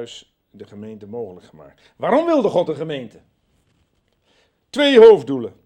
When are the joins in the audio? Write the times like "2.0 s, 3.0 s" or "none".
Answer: none